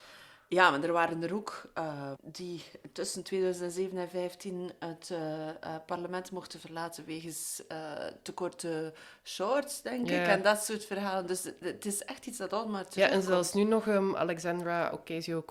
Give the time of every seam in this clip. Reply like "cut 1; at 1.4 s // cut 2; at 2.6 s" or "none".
cut 1; at 2.2 s